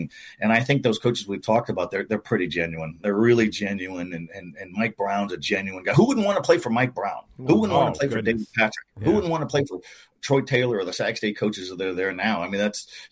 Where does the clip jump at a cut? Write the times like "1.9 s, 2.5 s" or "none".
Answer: none